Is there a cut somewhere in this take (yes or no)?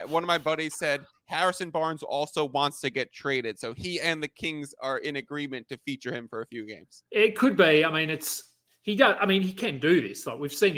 yes